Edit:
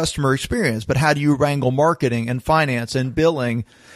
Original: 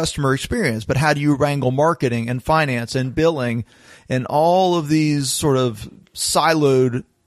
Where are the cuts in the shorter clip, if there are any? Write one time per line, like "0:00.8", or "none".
none